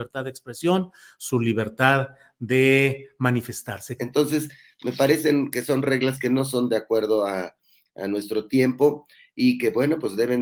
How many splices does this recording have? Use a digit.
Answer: 1